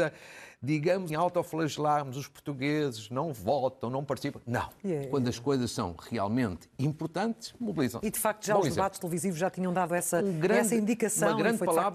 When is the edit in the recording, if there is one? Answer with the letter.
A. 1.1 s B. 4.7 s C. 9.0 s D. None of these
A